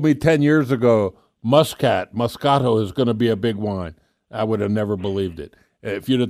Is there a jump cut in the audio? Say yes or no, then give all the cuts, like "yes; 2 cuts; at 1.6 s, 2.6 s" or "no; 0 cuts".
no; 0 cuts